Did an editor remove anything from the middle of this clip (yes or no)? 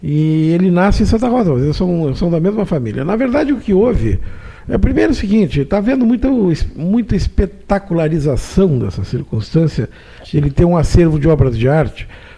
no